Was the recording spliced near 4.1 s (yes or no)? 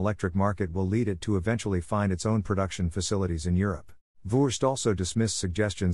yes